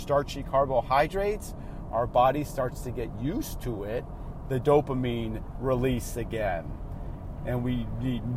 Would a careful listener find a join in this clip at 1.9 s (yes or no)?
no